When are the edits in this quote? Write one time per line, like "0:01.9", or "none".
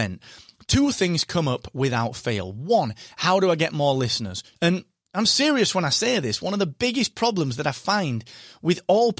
0:04.5